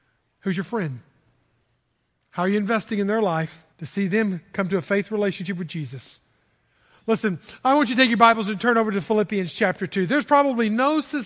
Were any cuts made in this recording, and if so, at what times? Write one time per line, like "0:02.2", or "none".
0:03.7